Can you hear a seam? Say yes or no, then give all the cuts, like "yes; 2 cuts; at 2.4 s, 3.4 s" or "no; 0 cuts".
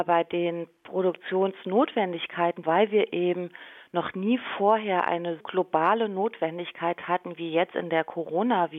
yes; 2 cuts; at 2.6 s, 5.4 s